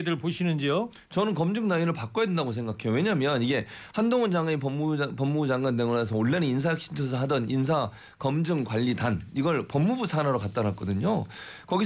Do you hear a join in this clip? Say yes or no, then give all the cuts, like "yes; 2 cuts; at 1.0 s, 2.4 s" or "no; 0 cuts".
no; 0 cuts